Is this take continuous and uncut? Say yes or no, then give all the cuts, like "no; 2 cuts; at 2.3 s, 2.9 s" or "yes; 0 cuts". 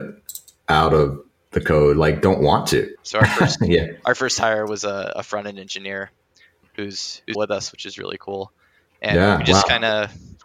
no; 2 cuts; at 3.0 s, 7.3 s